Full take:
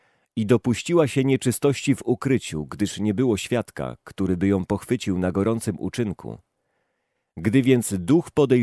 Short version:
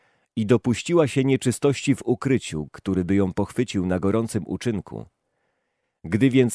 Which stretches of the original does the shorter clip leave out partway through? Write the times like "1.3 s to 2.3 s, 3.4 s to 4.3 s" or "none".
2.7 s to 4.0 s

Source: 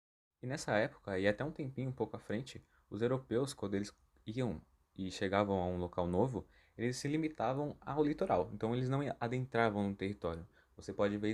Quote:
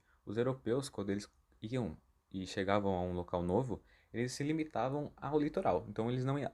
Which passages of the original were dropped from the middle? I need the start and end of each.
none

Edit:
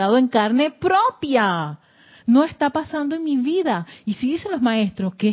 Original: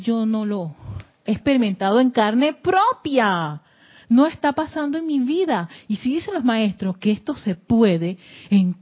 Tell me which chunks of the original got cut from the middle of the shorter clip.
none

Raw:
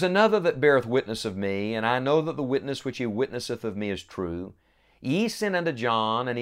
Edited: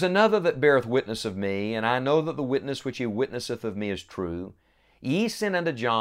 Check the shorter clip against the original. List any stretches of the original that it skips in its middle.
none

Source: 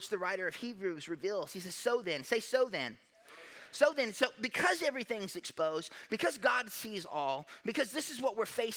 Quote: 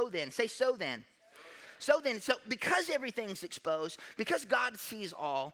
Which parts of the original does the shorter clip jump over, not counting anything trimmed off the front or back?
none

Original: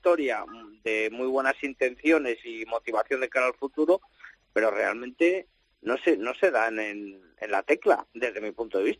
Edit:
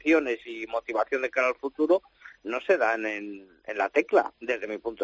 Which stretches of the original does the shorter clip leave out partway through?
4.4 s to 6.2 s

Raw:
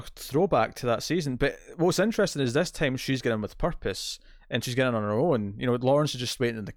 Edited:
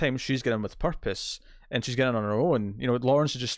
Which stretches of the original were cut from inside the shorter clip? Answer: none

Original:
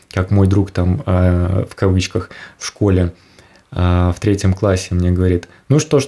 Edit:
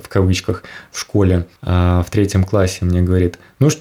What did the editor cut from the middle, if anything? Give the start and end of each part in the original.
3.2 s to 3.7 s

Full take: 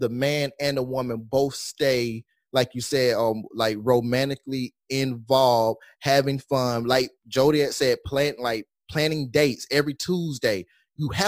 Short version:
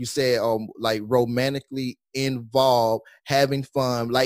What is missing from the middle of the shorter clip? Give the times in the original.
none

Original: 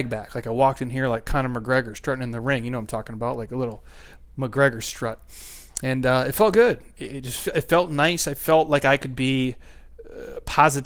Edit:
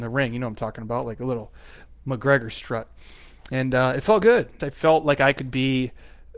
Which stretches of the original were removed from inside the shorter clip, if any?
6.9 s to 8.2 s

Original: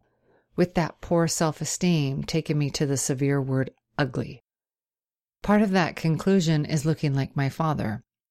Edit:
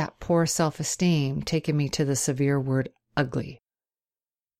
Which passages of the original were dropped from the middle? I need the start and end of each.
none

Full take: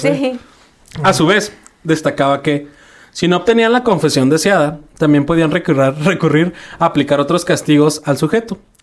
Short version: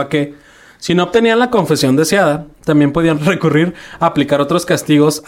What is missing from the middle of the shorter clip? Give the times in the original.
5.5 s to 6.0 s

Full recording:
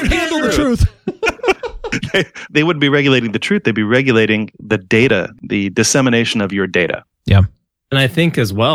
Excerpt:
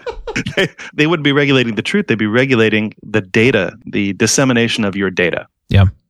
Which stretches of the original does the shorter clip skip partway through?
none

